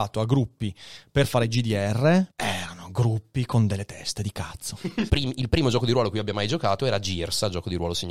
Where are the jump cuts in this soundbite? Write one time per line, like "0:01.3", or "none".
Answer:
0:02.3
0:05.1